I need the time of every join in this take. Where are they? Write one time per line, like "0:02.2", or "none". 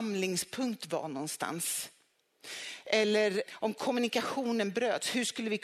0:03.5